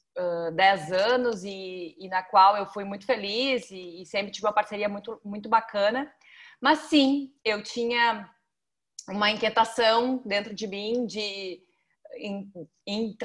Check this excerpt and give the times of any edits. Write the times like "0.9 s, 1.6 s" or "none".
none